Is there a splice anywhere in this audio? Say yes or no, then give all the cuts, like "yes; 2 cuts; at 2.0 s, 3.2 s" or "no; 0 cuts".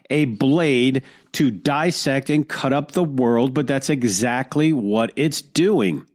no; 0 cuts